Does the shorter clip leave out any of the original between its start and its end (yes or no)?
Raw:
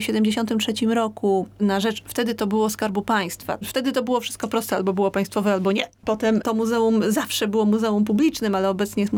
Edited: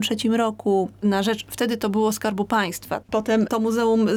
yes